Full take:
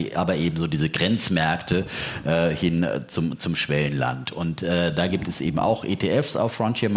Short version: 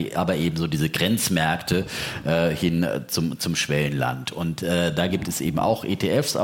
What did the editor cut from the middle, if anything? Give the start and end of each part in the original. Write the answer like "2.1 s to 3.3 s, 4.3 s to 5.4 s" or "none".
none